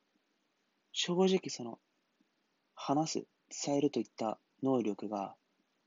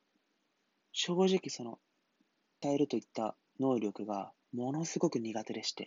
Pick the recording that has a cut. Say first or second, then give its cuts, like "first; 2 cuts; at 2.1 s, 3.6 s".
second; 2 cuts; at 2.6 s, 4.4 s